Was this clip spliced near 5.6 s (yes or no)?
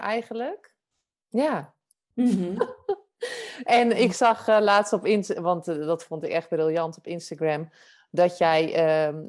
no